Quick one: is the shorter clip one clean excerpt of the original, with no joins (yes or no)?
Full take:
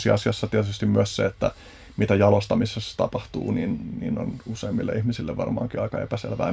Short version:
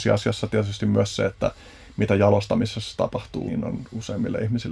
no